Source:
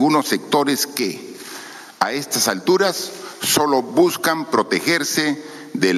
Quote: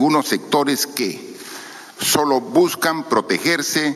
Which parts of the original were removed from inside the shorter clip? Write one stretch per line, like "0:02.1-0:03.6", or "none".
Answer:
0:02.0-0:03.4

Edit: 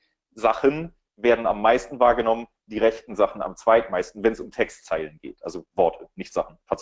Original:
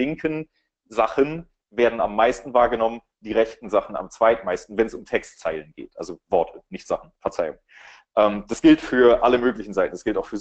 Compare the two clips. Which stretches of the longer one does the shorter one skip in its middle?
none

